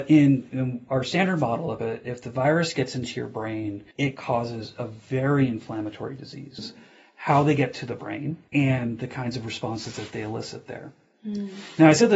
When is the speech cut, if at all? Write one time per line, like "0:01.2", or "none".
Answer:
0:03.9
0:06.6
0:08.5